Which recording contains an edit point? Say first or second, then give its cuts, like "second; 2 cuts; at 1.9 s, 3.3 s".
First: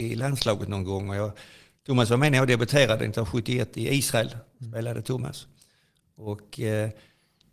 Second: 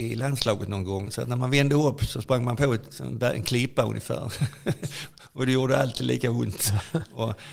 second; 1 cut; at 1.1 s